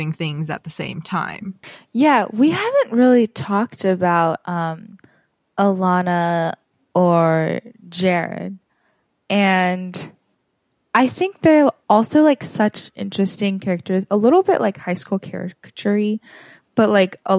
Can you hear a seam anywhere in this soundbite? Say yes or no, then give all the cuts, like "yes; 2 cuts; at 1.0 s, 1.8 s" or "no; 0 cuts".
no; 0 cuts